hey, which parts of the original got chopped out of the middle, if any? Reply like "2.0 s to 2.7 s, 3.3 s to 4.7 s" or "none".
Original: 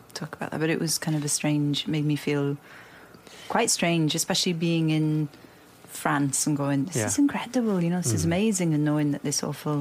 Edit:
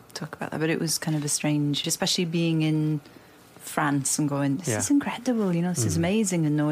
1.8 s to 4.1 s